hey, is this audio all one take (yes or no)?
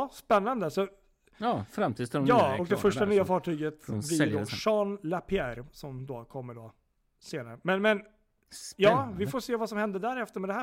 yes